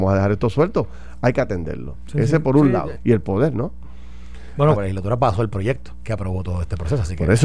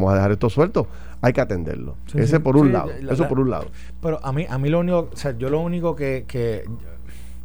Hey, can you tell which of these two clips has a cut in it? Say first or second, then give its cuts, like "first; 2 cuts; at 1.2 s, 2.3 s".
first; 2 cuts; at 2.9 s, 4.7 s